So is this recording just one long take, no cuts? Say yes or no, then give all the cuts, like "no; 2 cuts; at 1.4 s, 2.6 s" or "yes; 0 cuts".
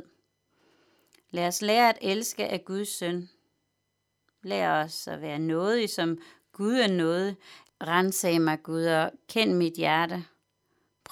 no; 1 cut; at 7.7 s